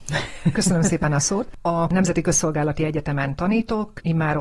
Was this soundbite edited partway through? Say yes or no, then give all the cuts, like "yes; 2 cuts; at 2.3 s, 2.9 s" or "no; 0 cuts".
no; 0 cuts